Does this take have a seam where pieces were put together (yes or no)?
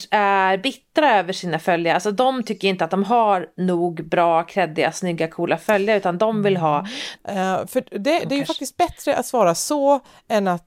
yes